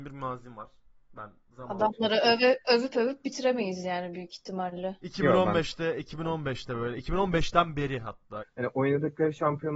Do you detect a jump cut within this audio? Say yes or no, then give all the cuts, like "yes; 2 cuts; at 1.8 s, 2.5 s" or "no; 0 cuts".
yes; 1 cut; at 8.4 s